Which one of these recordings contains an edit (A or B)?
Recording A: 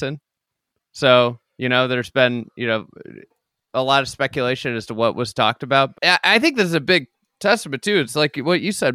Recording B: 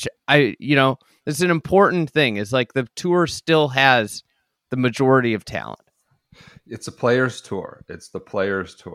A